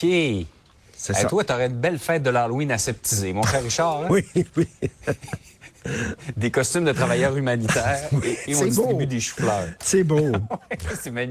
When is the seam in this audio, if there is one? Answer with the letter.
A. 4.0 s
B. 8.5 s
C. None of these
B